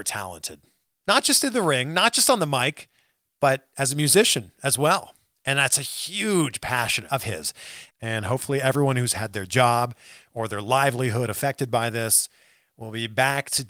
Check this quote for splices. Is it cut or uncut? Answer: cut